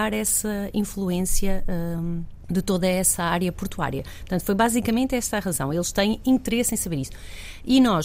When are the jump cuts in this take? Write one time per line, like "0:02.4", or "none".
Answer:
none